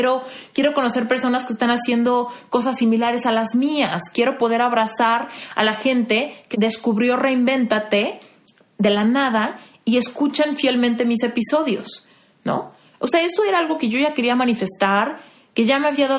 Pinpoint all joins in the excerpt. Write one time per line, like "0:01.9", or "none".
0:06.5